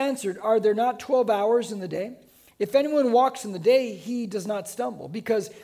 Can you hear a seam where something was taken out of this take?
no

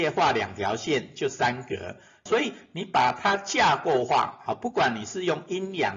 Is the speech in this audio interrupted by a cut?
yes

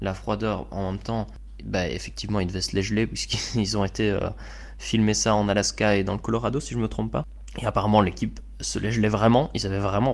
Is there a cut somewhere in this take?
no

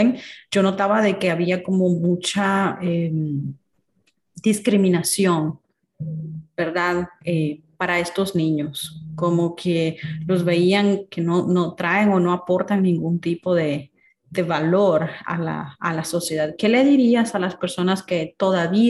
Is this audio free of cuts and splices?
yes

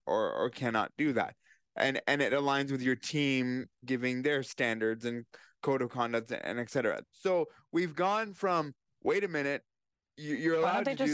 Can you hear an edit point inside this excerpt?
yes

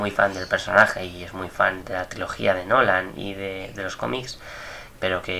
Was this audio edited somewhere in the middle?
yes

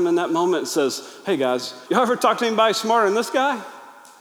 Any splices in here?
yes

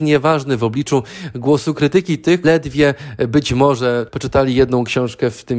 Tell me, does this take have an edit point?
yes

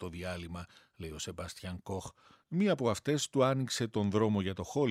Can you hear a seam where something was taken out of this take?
yes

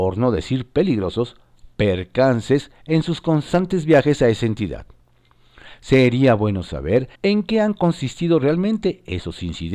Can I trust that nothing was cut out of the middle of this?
no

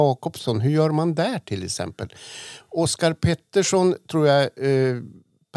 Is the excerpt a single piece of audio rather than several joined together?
yes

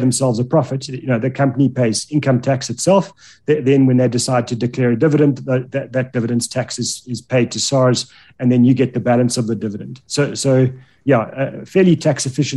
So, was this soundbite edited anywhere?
no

